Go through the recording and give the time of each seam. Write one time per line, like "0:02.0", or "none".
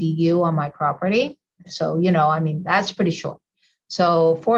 0:01.6